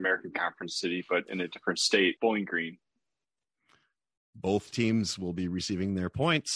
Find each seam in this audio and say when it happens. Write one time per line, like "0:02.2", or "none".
0:02.2